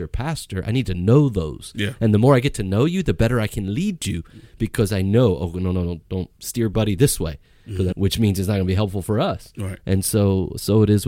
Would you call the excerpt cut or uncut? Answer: cut